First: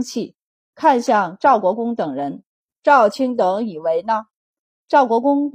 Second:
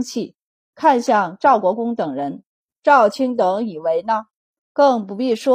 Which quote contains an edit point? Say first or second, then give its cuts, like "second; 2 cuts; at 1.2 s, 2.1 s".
second; 1 cut; at 4.6 s